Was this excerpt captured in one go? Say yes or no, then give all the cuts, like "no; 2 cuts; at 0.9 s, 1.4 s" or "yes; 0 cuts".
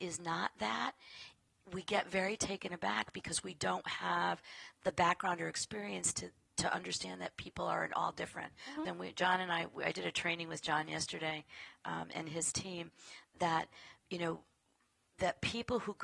no; 1 cut; at 8.9 s